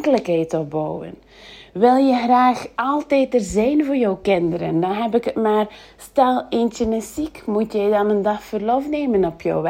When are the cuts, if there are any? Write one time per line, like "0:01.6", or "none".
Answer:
none